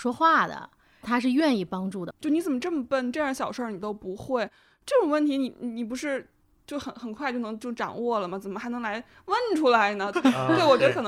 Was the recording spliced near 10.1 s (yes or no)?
yes